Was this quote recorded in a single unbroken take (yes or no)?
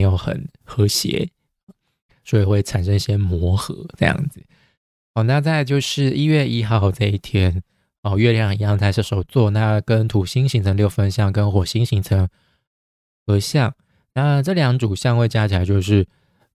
yes